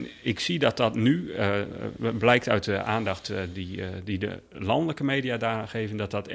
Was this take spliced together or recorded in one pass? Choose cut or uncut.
uncut